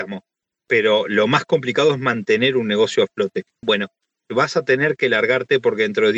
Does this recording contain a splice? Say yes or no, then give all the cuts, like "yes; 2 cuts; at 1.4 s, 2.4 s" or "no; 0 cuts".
yes; 1 cut; at 3.6 s